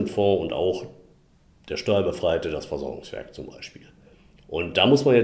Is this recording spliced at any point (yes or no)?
no